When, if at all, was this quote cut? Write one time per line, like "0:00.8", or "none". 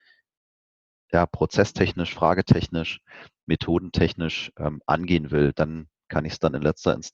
none